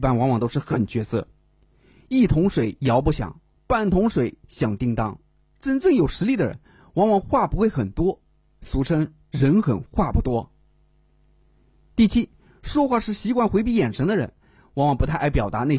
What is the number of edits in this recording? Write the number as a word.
zero